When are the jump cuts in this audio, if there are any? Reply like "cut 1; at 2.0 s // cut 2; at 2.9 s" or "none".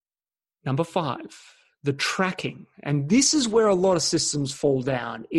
none